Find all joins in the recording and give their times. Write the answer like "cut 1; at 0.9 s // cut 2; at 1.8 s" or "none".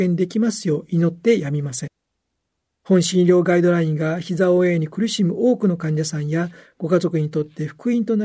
cut 1; at 2.7 s